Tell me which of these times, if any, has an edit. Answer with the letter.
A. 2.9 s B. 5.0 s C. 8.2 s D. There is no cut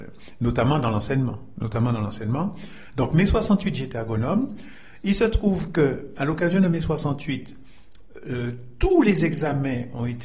D